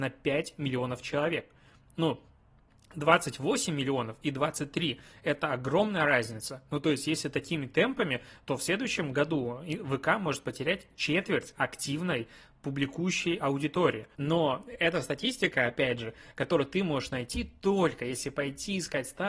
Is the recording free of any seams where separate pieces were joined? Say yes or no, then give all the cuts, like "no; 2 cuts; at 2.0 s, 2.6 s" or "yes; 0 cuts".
no; 1 cut; at 14.1 s